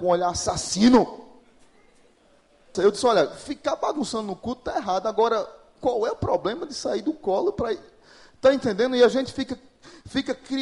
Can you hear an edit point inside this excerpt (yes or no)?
yes